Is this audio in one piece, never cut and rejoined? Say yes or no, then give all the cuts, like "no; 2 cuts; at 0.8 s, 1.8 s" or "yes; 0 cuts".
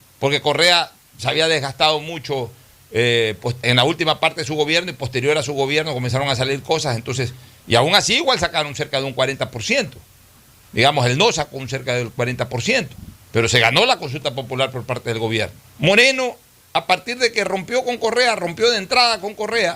no; 3 cuts; at 3.6 s, 13.2 s, 15.6 s